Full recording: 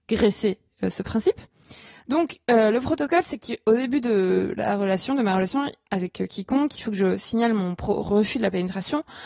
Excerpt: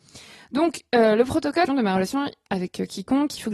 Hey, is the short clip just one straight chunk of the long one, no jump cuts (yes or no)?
no